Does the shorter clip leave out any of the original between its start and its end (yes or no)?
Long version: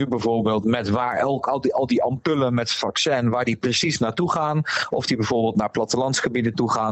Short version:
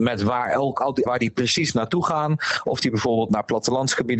yes